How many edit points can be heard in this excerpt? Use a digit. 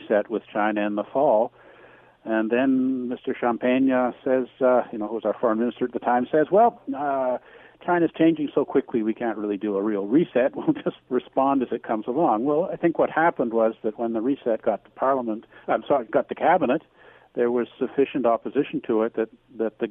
1